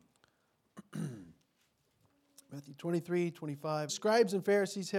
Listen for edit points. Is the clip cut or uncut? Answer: cut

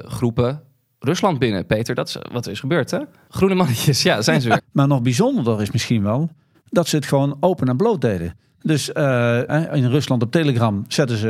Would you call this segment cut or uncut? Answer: cut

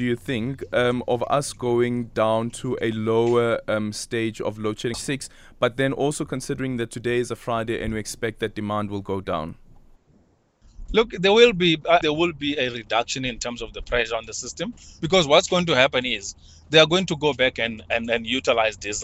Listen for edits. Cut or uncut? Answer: cut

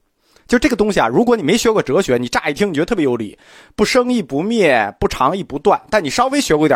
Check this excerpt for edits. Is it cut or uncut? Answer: uncut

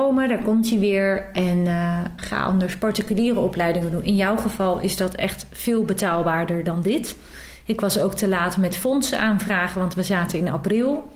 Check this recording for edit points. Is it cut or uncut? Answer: cut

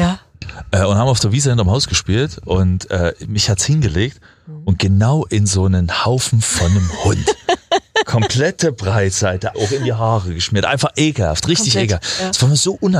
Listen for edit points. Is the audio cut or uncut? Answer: cut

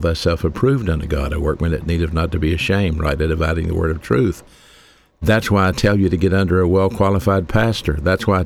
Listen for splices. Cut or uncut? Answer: uncut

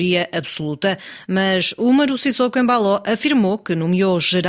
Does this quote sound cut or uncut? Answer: uncut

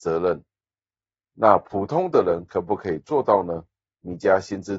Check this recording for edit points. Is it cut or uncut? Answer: cut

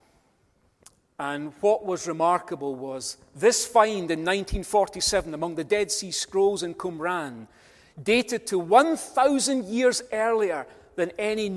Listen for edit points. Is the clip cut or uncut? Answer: uncut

